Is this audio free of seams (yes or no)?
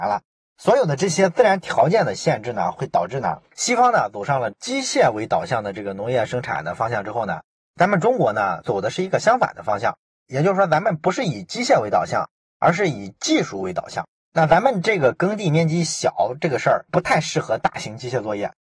no